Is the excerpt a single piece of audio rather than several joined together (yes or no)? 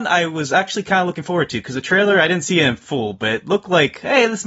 yes